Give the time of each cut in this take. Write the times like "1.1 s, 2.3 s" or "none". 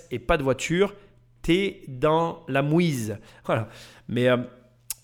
3.4 s